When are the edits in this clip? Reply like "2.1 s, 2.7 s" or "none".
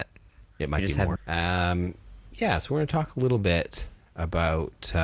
1.2 s, 2.3 s